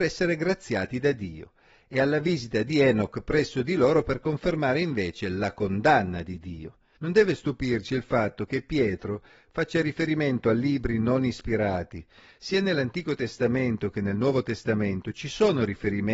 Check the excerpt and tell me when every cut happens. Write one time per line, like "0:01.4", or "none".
0:07.0